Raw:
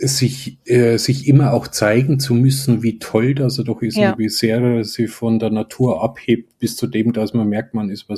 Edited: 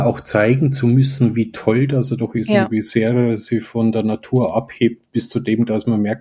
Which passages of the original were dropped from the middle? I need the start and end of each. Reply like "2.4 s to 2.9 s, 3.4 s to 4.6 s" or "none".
none